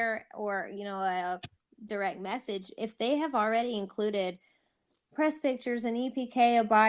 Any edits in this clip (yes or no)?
no